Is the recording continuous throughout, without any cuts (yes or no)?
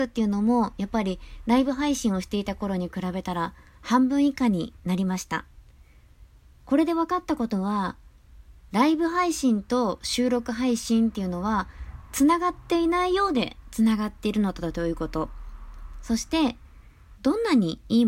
no